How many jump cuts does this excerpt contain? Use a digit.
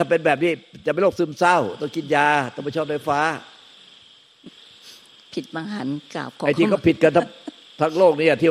0